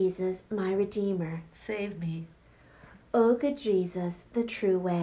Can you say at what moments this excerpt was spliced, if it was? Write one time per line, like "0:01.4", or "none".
0:03.0

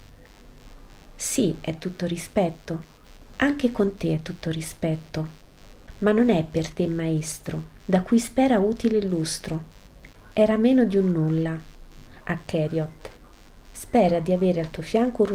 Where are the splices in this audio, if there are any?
0:07.8
0:12.2

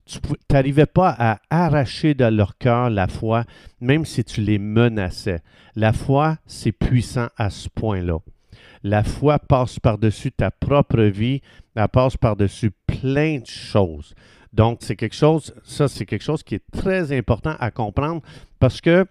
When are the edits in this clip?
0:14.8
0:15.9

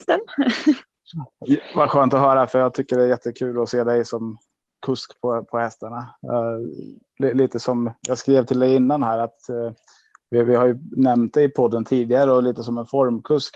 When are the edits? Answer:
none

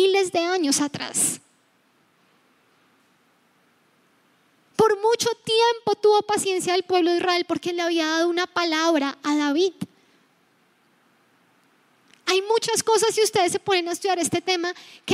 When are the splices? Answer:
none

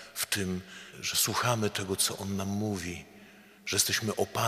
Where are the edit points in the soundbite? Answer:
0:00.9

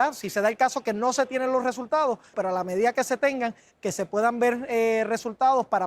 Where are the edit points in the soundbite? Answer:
0:02.3
0:03.7

